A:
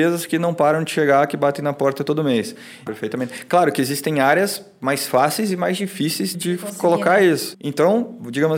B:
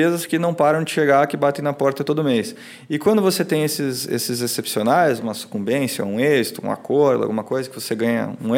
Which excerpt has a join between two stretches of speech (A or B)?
A